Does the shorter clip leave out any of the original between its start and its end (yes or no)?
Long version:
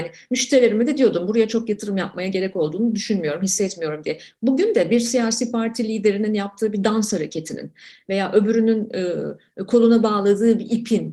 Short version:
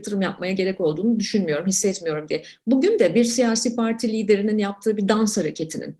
no